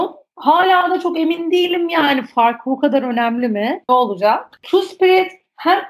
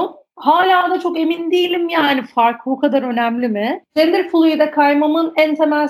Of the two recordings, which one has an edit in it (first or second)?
first